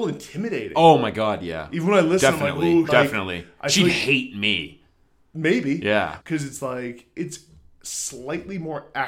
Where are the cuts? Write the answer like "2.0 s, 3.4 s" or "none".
2.9 s, 6.2 s